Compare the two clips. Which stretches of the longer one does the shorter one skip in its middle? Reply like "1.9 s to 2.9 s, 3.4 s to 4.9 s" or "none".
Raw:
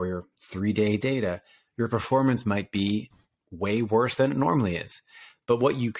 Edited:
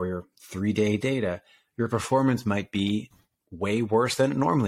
none